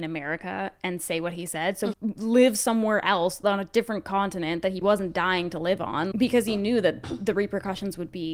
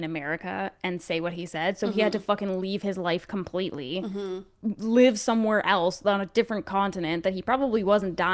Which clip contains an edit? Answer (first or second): first